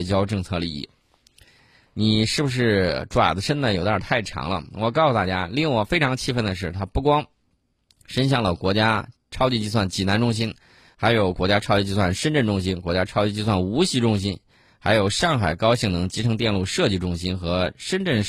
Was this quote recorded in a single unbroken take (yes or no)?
no